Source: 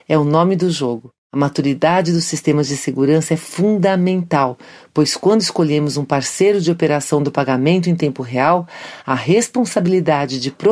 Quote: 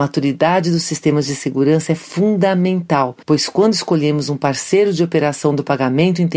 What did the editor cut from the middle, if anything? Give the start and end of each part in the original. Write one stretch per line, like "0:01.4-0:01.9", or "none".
0:04.6-0:04.9